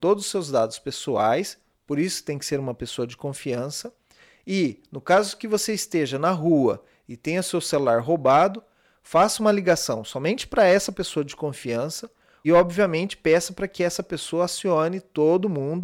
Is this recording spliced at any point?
yes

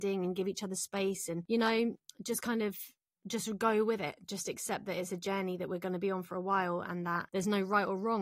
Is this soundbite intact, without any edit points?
yes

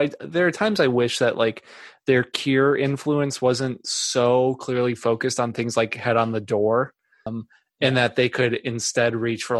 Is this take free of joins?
no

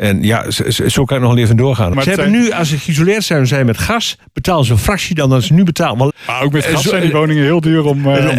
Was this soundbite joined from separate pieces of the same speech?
yes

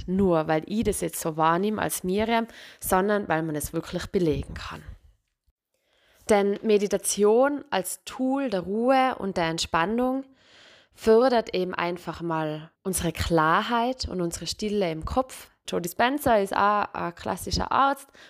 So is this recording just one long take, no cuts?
no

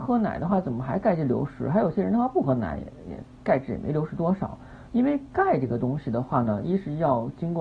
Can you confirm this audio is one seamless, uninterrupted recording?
yes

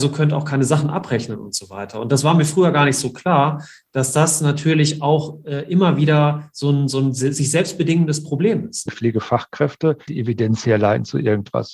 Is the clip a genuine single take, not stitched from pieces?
no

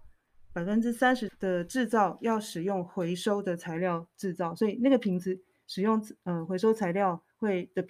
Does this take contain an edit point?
yes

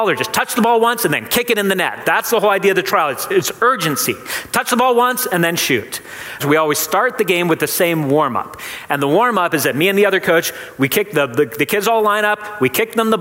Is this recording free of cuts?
no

